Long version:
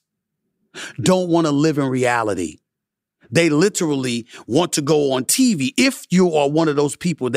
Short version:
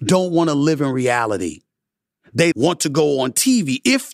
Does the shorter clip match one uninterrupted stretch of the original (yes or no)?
no